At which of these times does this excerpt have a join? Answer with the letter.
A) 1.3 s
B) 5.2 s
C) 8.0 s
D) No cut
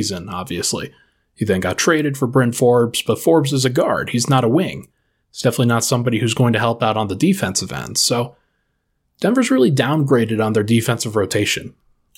D